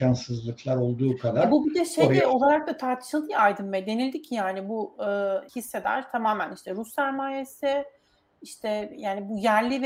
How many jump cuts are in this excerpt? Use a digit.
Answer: 1